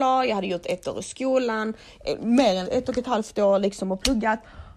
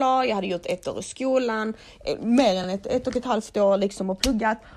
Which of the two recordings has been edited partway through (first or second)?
first